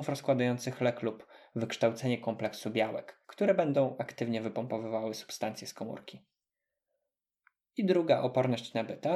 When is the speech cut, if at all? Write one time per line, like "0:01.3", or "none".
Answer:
0:03.2